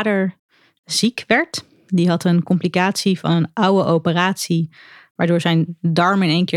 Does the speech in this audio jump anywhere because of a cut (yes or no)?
no